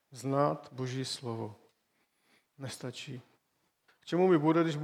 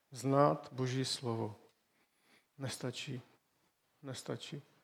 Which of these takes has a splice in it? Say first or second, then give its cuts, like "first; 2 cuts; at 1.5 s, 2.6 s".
first; 1 cut; at 3.9 s